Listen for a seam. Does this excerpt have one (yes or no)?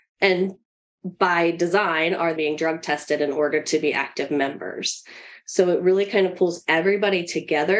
yes